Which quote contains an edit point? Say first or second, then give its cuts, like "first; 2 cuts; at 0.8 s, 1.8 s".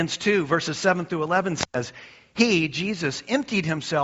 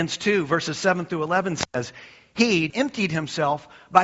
second; 1 cut; at 2.7 s